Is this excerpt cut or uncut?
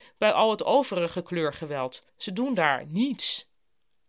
cut